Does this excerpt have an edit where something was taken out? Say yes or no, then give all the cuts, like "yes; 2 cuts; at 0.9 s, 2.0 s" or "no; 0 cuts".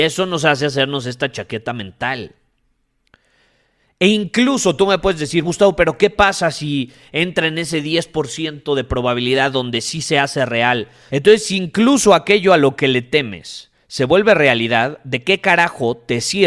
yes; 2 cuts; at 5.4 s, 11.1 s